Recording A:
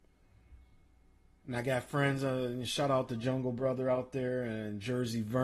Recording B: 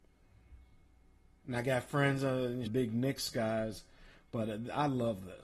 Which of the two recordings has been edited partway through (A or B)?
B